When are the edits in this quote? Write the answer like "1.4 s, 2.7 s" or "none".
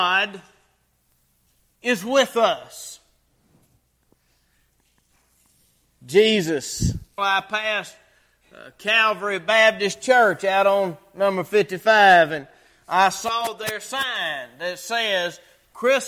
7.2 s